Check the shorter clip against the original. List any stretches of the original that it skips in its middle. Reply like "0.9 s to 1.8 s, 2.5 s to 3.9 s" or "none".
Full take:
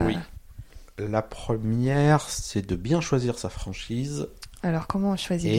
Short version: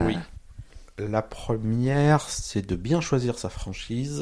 none